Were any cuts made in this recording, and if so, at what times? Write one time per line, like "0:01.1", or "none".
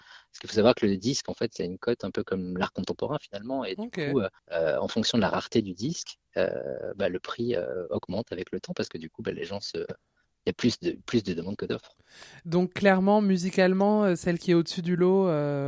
0:04.4